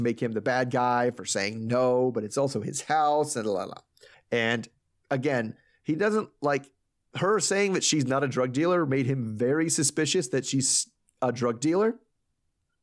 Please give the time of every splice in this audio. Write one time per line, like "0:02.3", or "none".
0:04.1